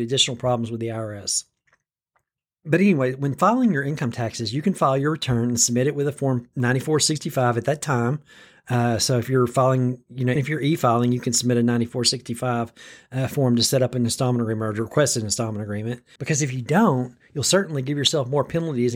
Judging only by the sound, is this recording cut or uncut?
cut